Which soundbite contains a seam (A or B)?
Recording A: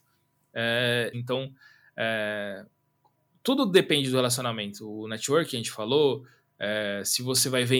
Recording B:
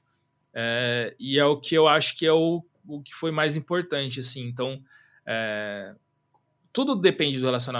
A